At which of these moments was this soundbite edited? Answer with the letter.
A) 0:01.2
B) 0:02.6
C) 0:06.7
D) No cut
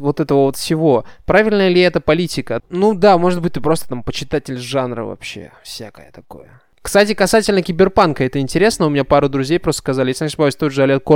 B